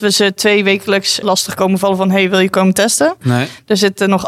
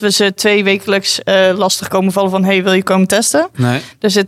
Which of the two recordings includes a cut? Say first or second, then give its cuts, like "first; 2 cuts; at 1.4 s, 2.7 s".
first; 1 cut; at 1.2 s